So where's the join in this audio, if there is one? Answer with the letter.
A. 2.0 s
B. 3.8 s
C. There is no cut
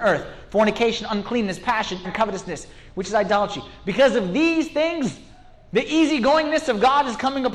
A